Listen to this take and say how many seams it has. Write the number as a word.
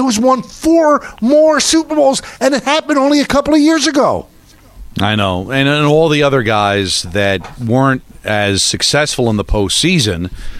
zero